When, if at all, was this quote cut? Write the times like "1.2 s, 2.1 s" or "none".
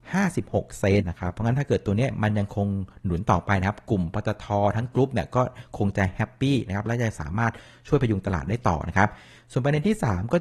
1.0 s